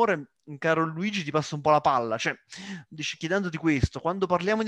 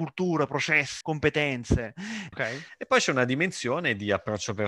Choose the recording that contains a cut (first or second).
second